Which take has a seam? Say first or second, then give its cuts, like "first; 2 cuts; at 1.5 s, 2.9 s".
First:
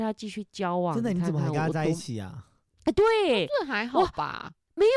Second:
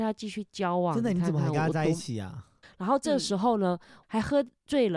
second; 2 cuts; at 2.6 s, 4.0 s